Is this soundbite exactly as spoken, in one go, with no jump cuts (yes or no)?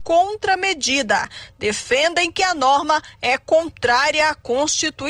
yes